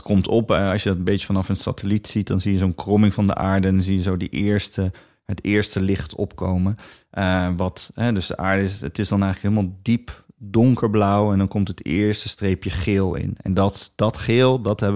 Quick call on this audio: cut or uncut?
uncut